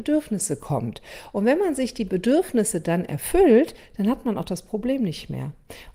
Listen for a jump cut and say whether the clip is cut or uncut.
uncut